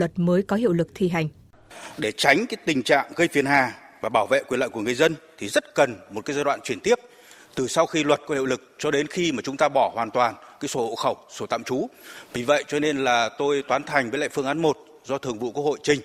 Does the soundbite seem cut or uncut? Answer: uncut